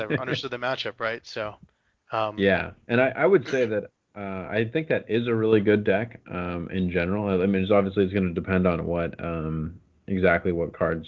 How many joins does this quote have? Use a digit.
0